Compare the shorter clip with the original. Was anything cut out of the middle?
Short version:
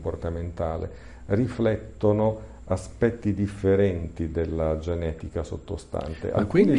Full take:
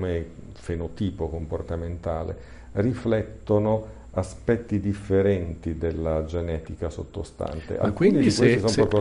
no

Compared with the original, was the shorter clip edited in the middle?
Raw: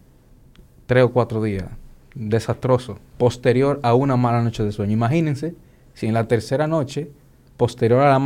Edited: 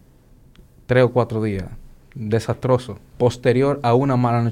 no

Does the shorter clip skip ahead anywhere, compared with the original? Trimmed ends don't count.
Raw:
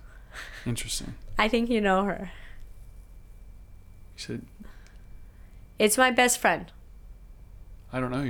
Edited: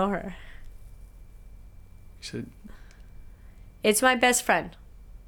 no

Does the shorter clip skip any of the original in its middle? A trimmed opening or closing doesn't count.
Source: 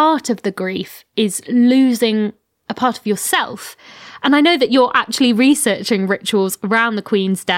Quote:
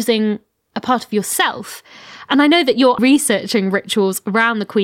yes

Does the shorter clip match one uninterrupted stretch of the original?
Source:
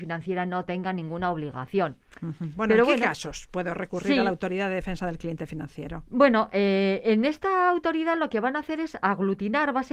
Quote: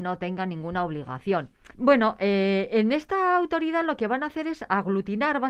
no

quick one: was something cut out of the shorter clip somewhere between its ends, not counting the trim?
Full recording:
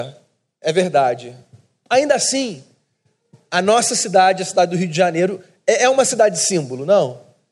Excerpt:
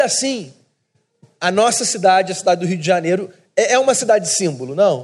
no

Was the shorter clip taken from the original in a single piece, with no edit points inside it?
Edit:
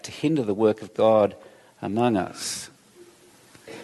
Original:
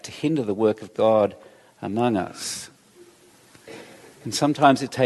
yes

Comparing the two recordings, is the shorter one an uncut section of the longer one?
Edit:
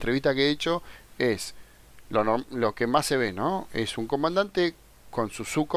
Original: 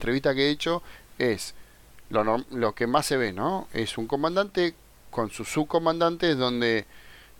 yes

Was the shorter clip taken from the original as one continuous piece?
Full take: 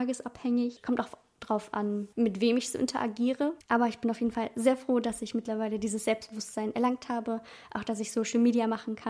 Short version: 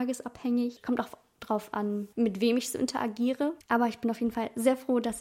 yes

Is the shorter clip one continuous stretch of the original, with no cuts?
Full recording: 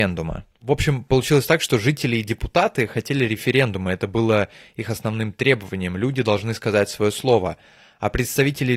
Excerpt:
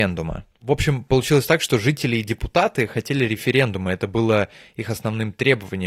yes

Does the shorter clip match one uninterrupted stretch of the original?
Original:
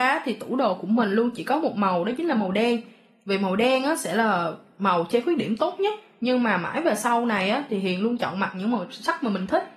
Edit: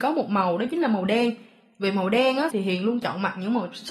no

